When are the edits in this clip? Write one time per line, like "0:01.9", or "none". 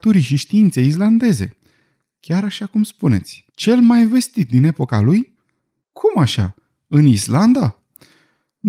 0:03.5
0:05.8